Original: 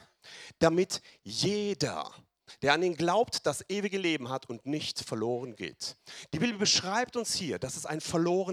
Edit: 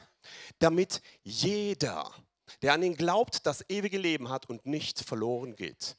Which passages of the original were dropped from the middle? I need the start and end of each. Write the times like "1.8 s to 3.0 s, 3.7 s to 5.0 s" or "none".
none